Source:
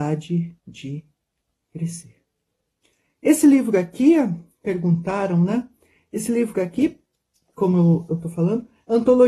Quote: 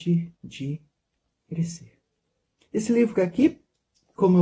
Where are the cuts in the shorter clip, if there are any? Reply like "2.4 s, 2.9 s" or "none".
2.6 s